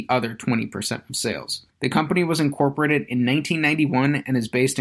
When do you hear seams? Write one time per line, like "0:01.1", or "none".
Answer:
0:01.7